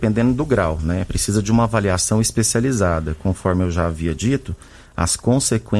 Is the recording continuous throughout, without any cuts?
yes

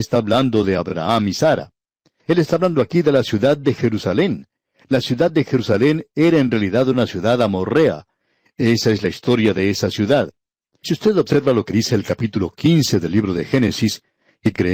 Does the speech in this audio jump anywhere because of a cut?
no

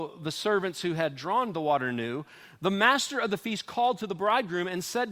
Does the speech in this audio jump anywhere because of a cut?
no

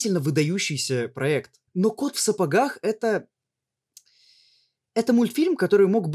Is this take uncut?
no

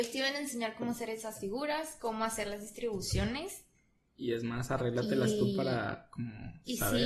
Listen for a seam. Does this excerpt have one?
no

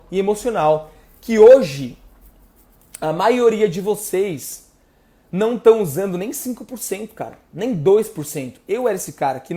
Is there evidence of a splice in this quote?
no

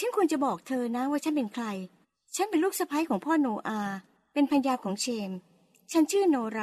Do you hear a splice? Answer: no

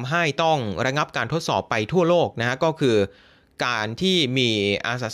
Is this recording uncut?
yes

